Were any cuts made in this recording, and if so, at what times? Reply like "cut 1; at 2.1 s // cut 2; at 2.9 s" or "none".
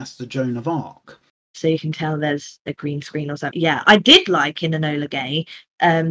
cut 1; at 1.5 s